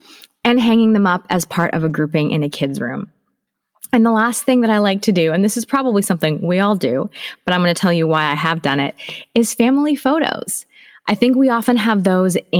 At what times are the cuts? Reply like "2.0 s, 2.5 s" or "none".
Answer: none